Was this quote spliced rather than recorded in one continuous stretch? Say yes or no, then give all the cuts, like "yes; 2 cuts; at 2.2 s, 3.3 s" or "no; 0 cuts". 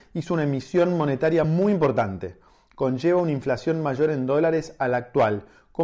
no; 0 cuts